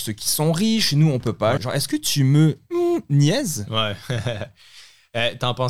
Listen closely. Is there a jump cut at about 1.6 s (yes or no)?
yes